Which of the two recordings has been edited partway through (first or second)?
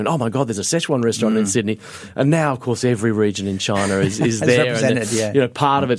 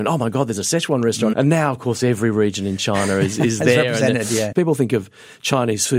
second